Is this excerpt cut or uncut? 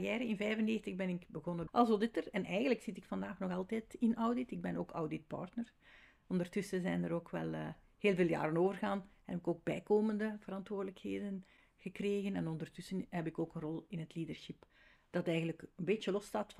uncut